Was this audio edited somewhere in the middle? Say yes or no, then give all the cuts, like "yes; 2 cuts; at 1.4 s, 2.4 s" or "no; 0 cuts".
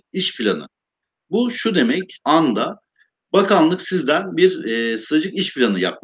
yes; 1 cut; at 2.2 s